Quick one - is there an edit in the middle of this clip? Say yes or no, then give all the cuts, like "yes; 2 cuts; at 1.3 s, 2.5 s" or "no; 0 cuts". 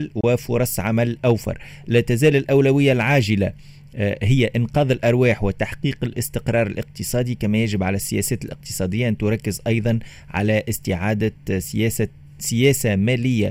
no; 0 cuts